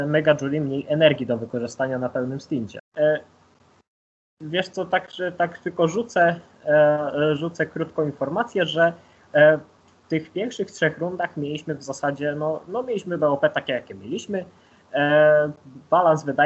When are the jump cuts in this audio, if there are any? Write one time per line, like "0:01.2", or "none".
0:02.8